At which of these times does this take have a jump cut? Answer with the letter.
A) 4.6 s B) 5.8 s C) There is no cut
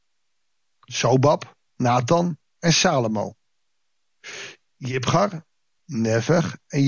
B